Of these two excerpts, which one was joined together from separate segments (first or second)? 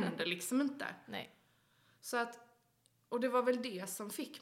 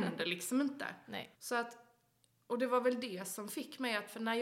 second